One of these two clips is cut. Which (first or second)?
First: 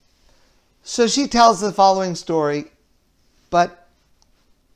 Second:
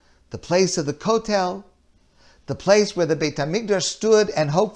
first